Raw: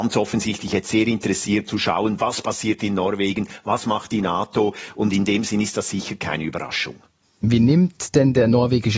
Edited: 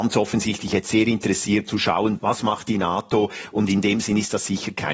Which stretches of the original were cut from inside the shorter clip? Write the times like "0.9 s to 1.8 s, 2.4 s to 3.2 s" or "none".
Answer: 2.2 s to 3.6 s

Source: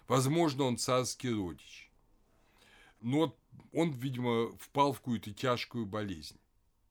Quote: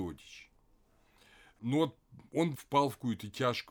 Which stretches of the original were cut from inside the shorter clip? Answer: 4.0 s to 4.6 s

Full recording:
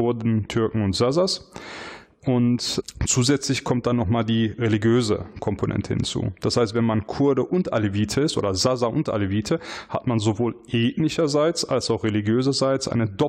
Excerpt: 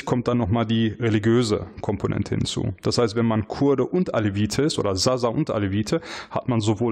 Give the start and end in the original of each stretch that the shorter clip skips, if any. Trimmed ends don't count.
none

